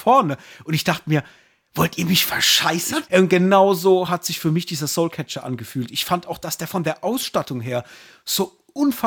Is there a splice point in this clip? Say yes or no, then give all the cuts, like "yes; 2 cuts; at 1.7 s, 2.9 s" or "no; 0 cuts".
yes; 1 cut; at 3.1 s